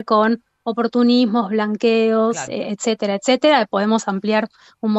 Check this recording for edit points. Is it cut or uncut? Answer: uncut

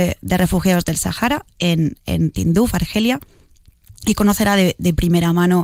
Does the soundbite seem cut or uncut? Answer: uncut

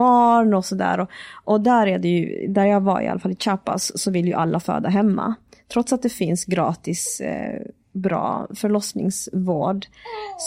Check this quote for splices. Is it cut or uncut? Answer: uncut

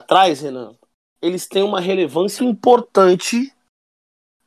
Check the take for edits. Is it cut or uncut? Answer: cut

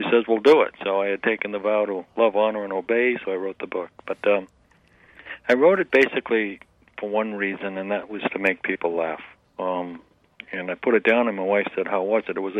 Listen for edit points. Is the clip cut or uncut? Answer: cut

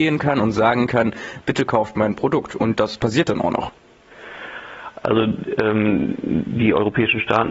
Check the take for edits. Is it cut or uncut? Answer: uncut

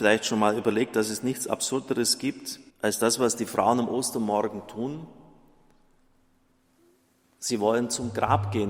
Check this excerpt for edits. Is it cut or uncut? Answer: cut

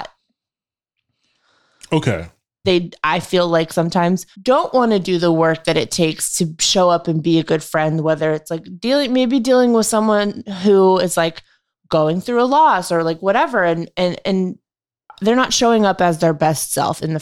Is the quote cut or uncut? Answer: cut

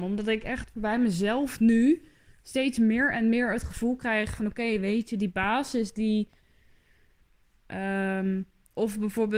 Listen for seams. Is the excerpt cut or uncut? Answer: cut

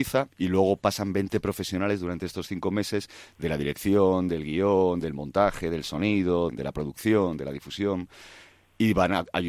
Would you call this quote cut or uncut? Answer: cut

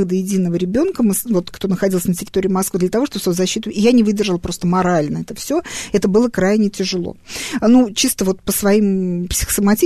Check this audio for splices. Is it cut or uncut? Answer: uncut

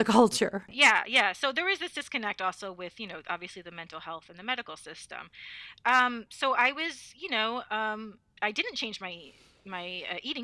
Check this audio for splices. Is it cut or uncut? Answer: uncut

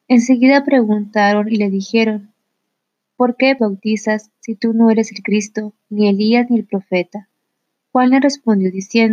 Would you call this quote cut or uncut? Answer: cut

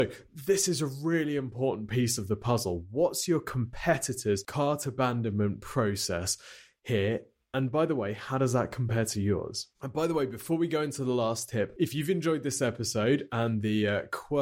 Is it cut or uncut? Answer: uncut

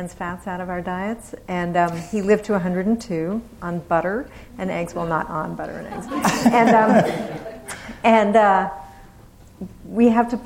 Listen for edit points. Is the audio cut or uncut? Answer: uncut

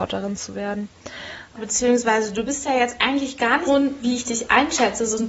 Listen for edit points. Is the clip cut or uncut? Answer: cut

